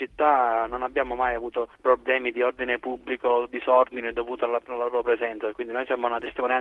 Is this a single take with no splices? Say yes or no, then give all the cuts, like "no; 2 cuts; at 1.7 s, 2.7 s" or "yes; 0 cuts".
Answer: yes; 0 cuts